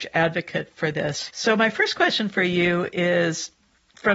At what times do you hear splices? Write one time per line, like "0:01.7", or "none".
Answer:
0:01.3